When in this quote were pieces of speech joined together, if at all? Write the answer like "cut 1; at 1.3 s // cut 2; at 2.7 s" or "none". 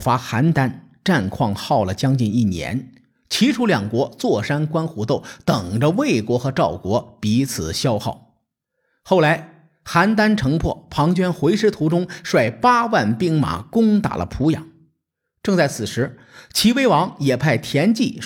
none

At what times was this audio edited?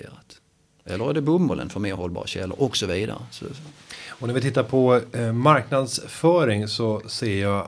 none

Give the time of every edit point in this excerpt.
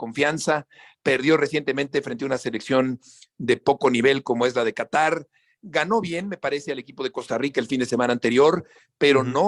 none

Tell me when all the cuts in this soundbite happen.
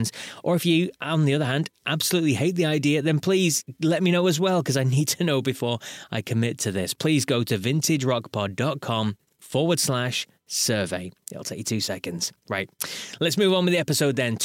none

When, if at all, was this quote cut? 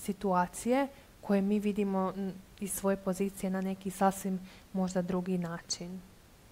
none

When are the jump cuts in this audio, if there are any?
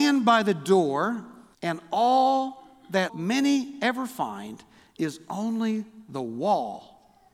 cut 1; at 1.5 s // cut 2; at 3.1 s

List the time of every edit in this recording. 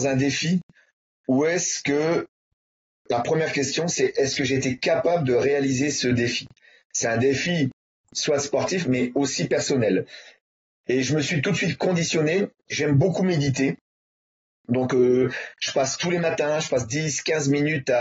none

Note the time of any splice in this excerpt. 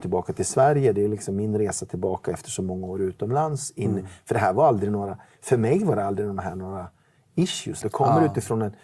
cut 1; at 7.8 s

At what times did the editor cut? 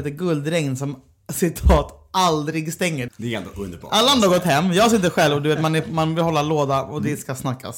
cut 1; at 3.1 s

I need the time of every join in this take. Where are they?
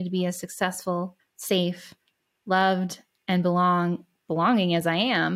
cut 1; at 1.2 s

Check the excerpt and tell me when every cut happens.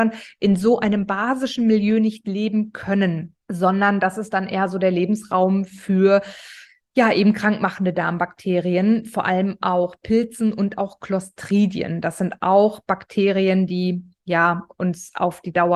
cut 1; at 3.4 s

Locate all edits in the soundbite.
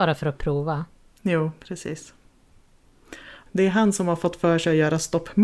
cut 1; at 3.5 s

